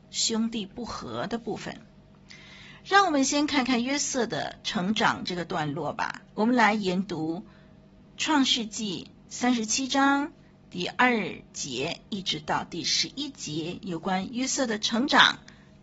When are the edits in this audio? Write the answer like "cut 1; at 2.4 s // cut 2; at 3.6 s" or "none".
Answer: cut 1; at 6.3 s